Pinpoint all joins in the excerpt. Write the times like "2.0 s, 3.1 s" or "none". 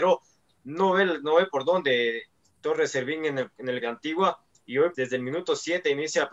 3.8 s, 4.9 s